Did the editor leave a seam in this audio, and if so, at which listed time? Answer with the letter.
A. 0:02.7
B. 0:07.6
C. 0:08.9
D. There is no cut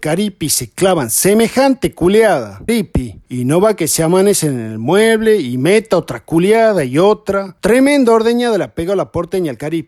A